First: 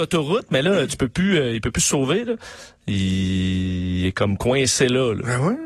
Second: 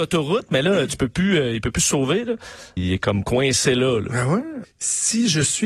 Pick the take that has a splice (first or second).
second